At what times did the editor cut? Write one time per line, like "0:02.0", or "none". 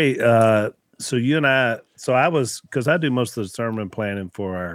0:01.9